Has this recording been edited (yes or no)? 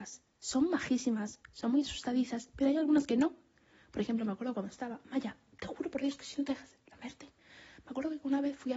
no